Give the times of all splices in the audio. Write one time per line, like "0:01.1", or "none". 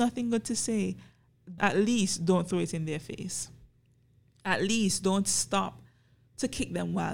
none

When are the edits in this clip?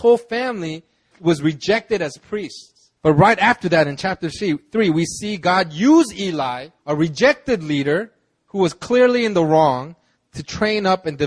0:01.1
0:03.0
0:06.8

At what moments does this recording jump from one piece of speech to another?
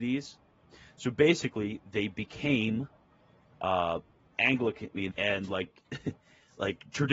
0:05.1

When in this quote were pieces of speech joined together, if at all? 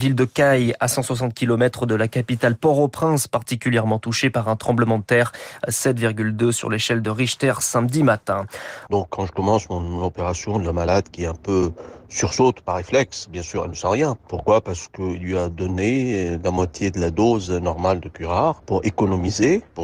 0:08.9

